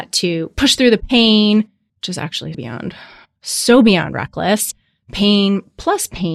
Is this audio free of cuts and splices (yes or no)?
no